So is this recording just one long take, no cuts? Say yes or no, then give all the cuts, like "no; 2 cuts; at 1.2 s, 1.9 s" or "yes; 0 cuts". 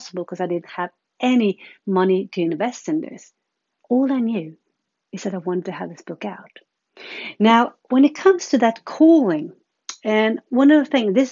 yes; 0 cuts